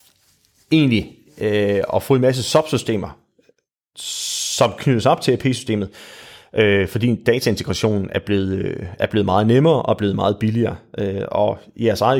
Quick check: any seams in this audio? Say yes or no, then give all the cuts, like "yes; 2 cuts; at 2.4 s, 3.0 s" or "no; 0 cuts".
no; 0 cuts